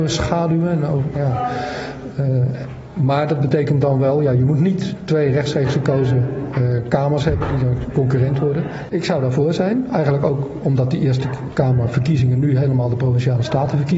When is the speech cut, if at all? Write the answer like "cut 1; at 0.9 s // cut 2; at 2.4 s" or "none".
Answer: cut 1; at 8.9 s